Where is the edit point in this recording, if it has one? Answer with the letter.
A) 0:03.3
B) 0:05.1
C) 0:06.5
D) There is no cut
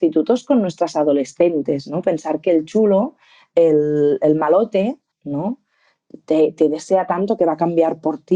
B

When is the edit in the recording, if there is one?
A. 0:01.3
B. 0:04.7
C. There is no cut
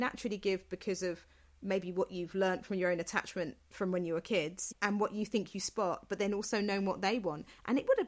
B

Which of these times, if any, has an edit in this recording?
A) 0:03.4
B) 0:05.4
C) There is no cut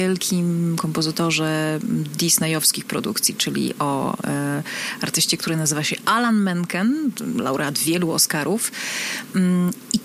C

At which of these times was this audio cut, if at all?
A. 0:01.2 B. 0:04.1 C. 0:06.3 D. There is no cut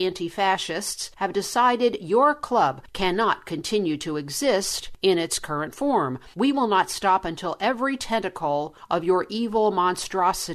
D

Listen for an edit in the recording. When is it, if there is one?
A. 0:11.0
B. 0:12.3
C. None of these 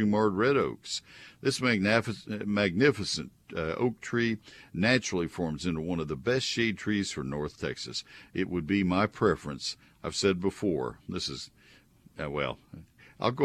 C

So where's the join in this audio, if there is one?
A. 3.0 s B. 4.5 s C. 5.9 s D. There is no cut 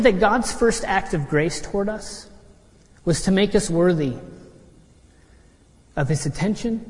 D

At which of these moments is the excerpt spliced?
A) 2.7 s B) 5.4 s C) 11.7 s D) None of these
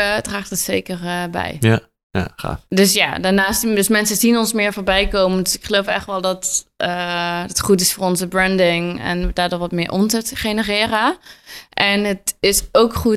A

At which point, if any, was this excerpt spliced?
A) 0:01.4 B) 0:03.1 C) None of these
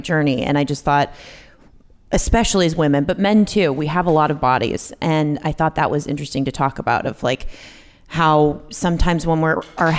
C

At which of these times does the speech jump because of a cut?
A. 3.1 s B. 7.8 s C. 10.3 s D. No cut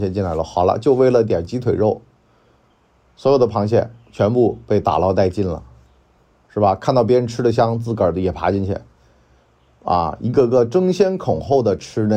D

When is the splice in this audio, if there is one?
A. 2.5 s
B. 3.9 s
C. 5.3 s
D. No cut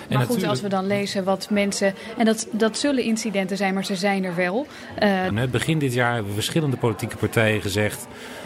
C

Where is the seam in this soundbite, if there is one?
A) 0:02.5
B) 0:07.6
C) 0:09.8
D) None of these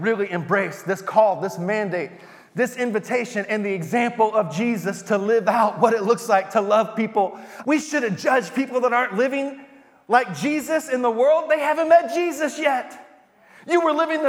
B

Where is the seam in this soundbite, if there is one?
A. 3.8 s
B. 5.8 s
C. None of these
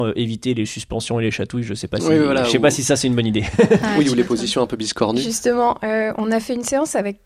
C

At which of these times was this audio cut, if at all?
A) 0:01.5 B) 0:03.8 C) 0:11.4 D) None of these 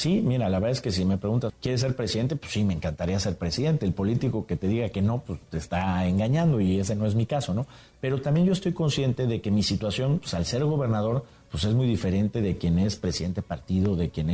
A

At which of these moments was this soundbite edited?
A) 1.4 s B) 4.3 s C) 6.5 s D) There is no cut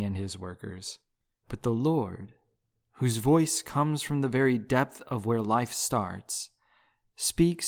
A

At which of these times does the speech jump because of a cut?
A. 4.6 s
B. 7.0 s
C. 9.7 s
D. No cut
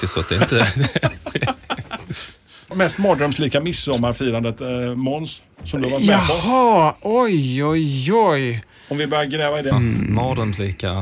C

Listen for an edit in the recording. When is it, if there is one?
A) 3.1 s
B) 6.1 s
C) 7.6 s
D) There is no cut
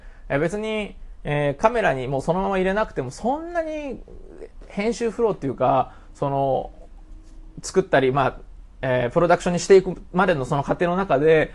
D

